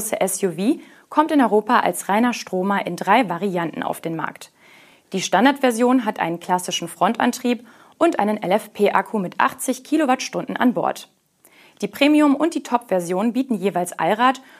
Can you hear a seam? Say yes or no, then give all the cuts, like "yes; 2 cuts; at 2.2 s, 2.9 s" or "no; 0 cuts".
no; 0 cuts